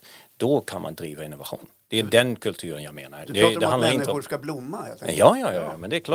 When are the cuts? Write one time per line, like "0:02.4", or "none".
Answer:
none